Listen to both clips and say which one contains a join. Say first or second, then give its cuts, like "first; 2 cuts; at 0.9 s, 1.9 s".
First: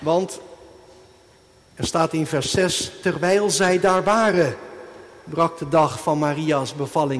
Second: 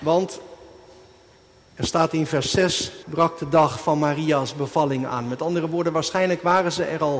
second; 1 cut; at 3.0 s